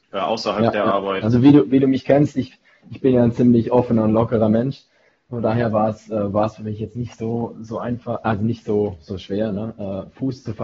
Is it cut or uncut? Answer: uncut